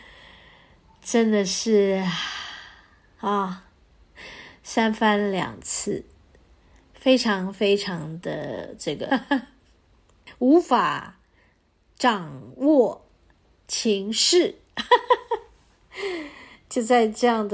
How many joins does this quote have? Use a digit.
1